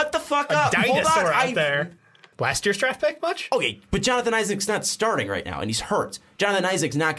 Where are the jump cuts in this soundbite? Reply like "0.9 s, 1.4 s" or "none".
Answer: 2.3 s